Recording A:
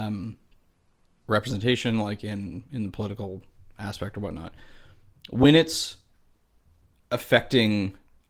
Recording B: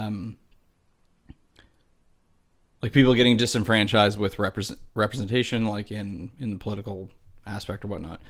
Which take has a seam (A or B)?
A